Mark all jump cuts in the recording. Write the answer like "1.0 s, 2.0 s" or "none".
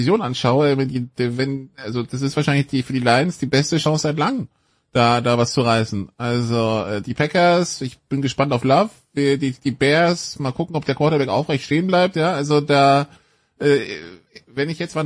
none